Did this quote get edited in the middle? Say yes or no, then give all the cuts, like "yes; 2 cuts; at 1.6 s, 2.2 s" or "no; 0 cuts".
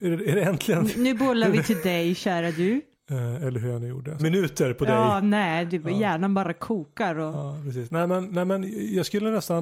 yes; 2 cuts; at 2.9 s, 4.2 s